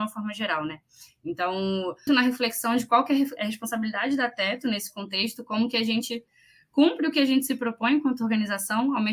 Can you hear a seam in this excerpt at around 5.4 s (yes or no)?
no